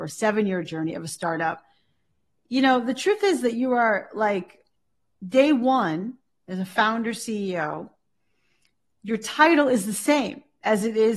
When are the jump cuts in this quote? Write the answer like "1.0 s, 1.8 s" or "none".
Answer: none